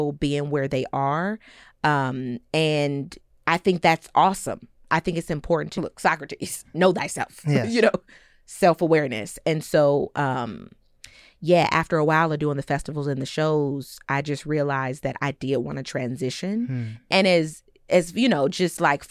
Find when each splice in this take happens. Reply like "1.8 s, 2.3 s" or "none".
5.7 s, 17.1 s